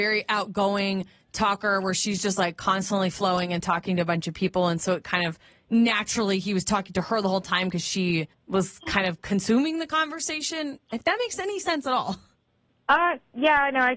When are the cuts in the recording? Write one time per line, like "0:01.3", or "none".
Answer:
none